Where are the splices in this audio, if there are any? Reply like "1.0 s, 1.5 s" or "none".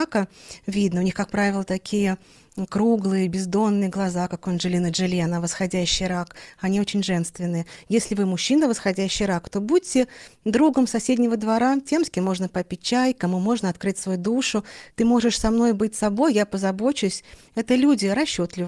14.9 s, 17.5 s